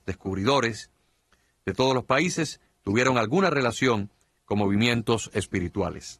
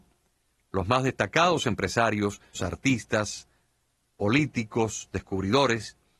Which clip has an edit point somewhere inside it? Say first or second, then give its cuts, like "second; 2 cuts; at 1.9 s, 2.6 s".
second; 1 cut; at 2.5 s